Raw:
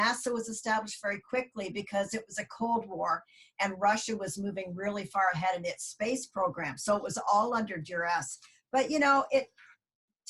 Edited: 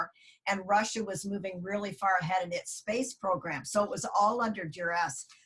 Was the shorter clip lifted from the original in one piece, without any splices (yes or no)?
yes